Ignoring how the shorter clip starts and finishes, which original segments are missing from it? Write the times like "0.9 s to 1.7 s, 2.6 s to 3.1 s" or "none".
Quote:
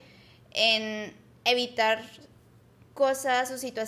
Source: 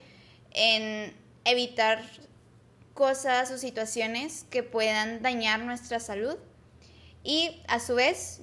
none